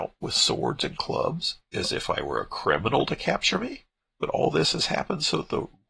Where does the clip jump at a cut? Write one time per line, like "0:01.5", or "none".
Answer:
0:04.0